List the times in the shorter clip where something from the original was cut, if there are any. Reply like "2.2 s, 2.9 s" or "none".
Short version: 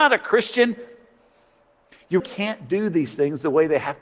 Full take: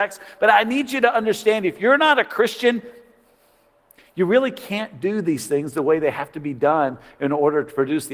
2.2 s